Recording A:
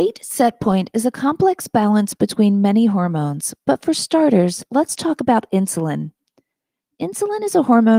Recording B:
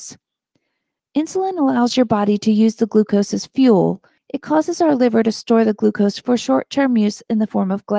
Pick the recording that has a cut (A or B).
B